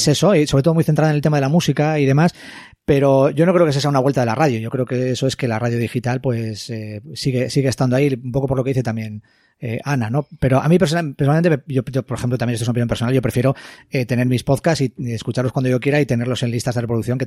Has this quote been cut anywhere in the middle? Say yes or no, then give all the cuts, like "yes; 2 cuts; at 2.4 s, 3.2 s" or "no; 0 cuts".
no; 0 cuts